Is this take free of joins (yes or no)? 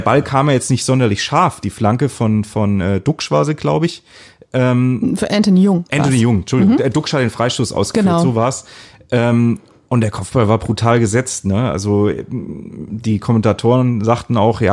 yes